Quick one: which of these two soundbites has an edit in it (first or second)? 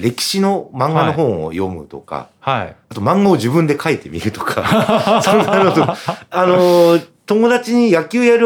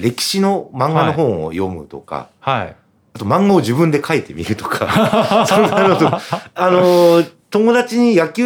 first